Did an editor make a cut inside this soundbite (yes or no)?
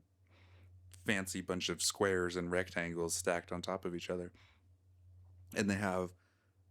no